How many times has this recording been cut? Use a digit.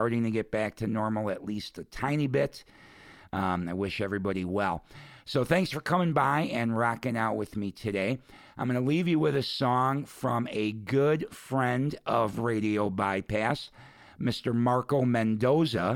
0